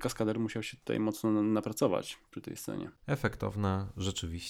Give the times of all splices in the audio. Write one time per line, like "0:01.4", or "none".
0:03.0

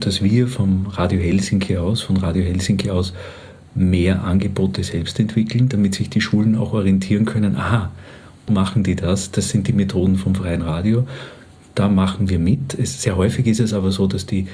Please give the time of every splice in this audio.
0:08.5

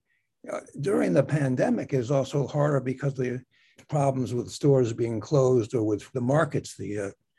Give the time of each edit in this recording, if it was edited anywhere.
0:03.8
0:06.1

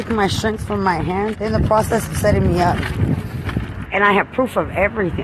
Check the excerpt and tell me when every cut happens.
0:01.3
0:03.9

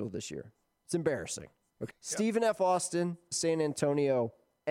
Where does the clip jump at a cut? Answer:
0:01.9
0:03.3

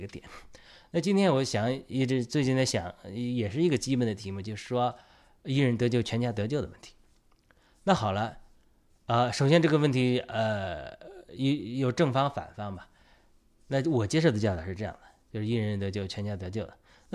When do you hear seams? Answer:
none

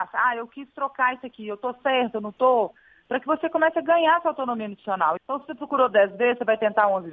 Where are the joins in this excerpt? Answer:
0:05.2

